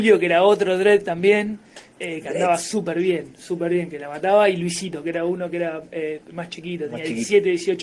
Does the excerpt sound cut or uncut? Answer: uncut